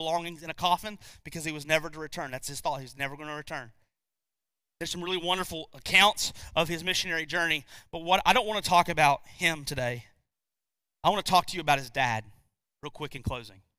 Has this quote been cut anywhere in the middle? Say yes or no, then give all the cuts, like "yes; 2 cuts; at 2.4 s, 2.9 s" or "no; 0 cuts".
no; 0 cuts